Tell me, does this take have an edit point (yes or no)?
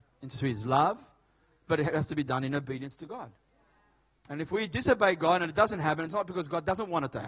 no